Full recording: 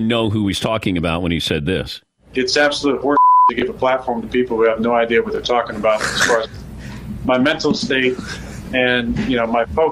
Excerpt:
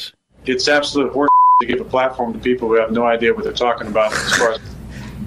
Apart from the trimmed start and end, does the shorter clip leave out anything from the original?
no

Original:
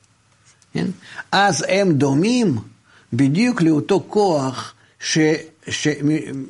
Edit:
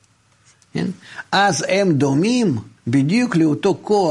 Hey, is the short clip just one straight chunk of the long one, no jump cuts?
no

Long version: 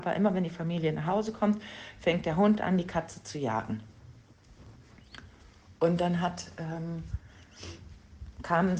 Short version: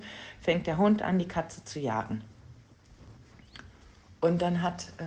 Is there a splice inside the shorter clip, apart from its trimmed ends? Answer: no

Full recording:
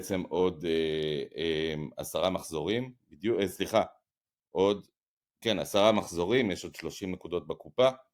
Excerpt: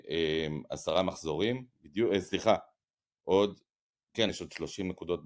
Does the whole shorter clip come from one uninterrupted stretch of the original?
no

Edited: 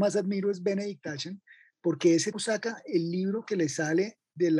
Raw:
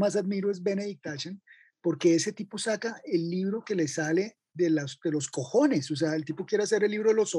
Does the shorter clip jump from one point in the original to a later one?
yes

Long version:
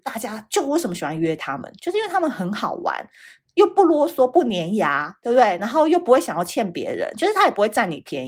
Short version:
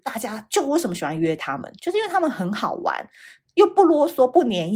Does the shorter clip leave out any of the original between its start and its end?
no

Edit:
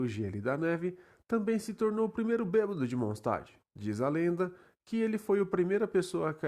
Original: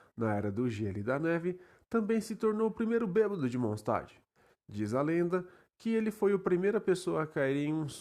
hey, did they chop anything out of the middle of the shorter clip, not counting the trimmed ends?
yes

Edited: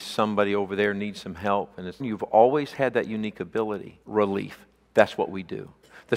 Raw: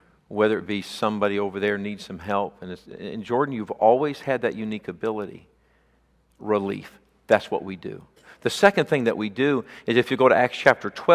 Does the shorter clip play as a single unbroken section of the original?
no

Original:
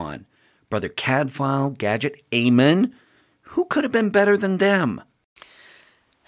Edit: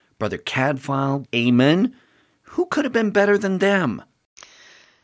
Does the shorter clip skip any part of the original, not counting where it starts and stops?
yes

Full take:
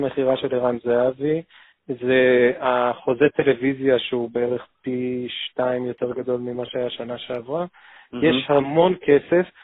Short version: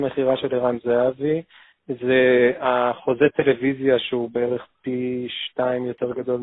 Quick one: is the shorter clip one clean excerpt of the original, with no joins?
yes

